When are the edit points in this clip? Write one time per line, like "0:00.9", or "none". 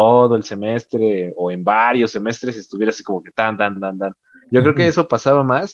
0:03.8